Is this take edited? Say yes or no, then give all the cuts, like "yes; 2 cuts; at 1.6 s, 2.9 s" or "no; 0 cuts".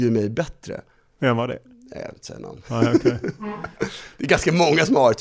no; 0 cuts